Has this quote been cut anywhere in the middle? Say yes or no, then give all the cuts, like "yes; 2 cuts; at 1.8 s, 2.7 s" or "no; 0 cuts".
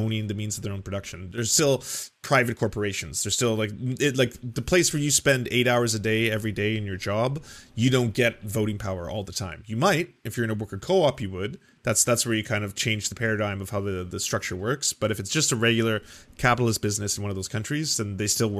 no; 0 cuts